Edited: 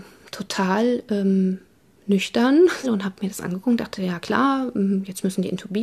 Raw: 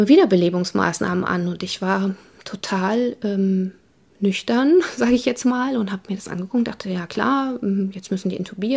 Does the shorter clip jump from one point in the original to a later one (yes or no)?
yes